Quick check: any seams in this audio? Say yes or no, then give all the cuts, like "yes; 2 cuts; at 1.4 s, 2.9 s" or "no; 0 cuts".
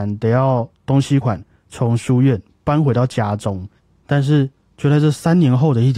yes; 2 cuts; at 1.2 s, 4.0 s